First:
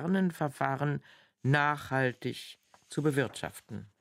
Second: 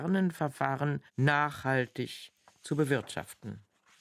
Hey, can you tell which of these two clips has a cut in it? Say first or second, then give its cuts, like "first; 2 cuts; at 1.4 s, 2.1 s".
second; 1 cut; at 1.1 s